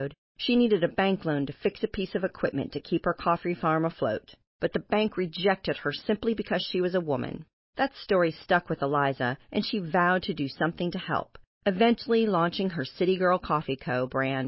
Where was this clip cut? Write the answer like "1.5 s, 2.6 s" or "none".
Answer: none